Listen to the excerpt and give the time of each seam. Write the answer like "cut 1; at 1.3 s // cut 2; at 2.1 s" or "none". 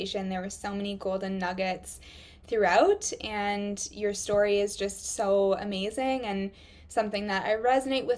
none